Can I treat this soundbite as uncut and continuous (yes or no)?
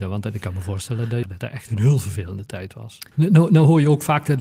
no